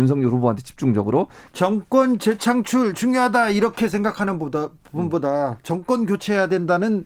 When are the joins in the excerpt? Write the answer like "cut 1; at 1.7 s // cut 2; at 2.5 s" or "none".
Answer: cut 1; at 1.5 s